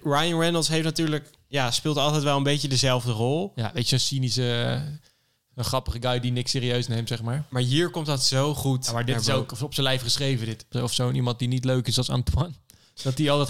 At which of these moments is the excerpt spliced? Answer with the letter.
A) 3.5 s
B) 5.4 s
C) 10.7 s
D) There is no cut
C